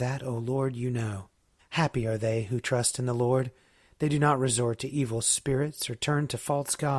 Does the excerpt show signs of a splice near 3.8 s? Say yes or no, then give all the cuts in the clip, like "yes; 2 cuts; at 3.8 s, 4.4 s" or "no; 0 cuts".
no; 1 cut; at 1.6 s